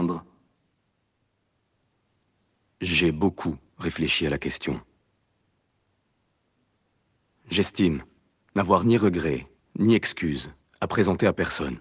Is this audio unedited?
yes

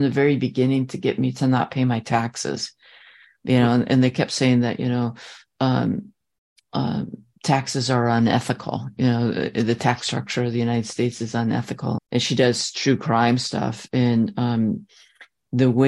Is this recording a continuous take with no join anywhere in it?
no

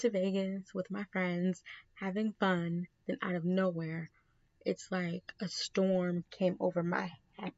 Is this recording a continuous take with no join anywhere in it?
yes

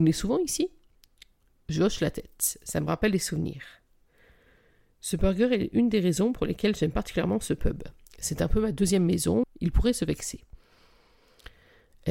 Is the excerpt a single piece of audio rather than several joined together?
no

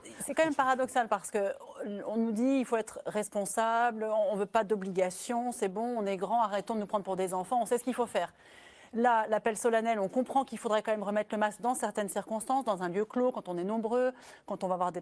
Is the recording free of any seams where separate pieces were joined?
yes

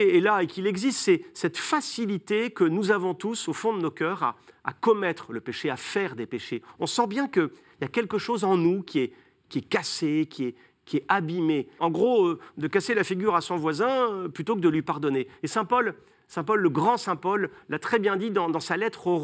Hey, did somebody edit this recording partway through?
yes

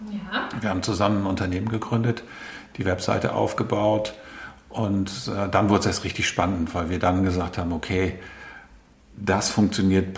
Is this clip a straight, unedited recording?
yes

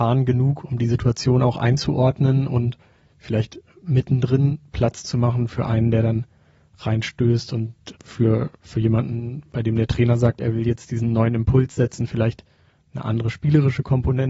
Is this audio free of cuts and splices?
no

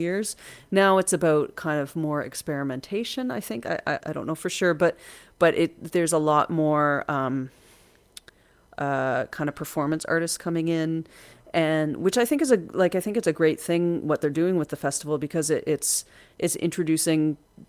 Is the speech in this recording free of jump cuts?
no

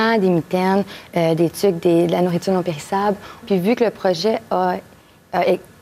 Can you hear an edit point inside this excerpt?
yes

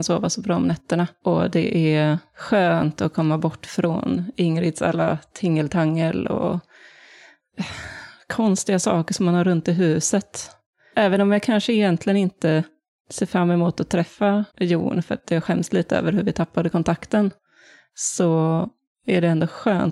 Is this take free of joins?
no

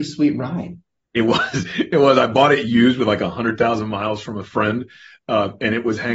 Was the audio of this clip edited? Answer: no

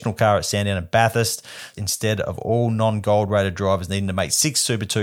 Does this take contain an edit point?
yes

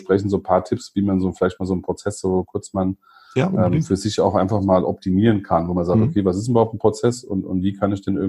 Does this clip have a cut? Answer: no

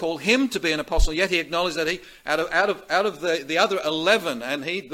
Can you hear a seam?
no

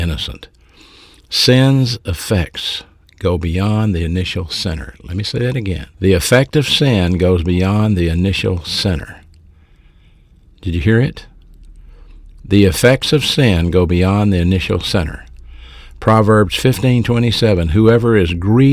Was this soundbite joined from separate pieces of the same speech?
yes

